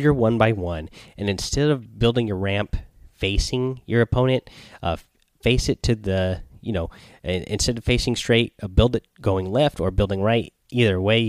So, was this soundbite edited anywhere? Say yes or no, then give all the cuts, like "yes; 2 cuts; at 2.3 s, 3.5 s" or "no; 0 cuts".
no; 0 cuts